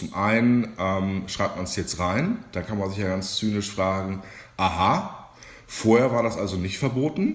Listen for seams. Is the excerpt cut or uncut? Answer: uncut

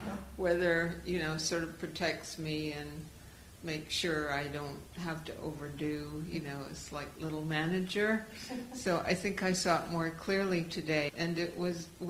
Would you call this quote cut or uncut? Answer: cut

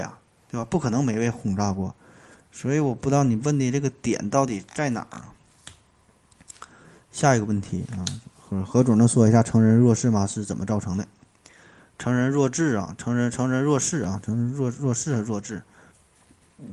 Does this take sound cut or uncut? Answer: uncut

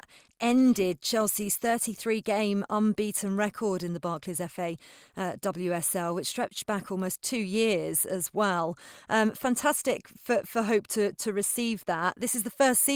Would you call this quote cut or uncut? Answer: uncut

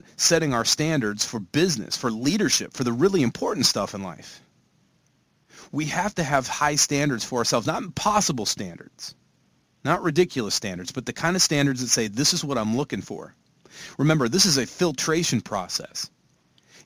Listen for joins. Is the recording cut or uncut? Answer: uncut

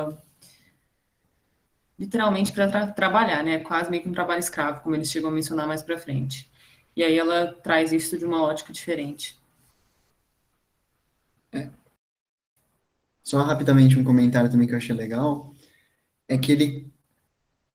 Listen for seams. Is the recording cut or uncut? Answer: uncut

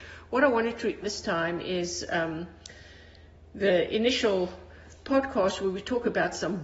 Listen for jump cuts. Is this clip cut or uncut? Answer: cut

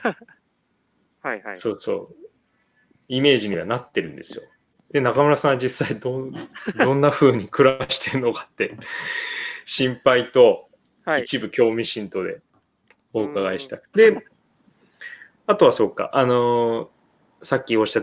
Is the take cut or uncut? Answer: cut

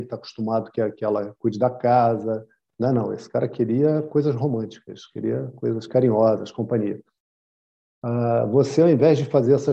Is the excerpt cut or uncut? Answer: uncut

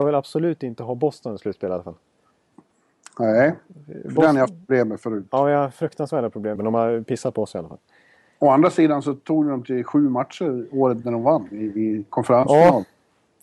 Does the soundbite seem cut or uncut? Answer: cut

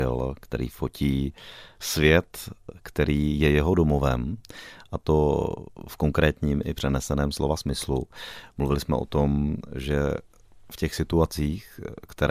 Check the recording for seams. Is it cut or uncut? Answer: uncut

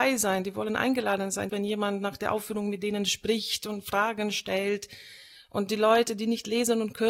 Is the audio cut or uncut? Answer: cut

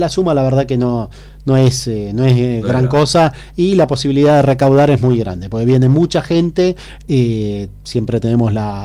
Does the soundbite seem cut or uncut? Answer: uncut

